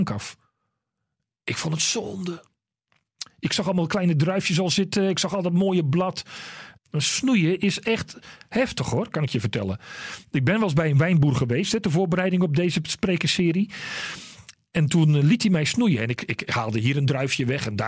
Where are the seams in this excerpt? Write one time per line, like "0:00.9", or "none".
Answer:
0:06.8